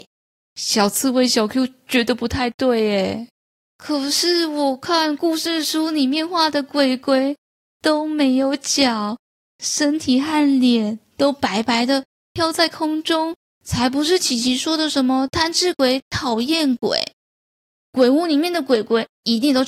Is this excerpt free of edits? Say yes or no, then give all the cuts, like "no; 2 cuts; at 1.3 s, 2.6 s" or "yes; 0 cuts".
yes; 0 cuts